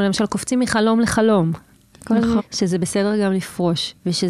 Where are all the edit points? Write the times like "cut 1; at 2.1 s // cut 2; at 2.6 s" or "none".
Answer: cut 1; at 2.4 s